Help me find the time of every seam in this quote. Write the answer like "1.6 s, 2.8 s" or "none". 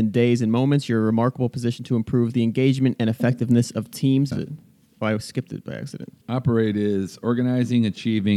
4.3 s, 6.2 s